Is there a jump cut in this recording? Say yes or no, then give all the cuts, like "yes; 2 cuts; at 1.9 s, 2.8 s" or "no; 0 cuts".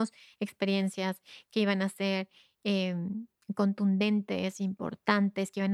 no; 0 cuts